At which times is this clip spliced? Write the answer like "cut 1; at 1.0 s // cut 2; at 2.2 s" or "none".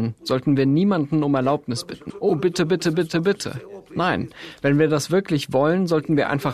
cut 1; at 2.1 s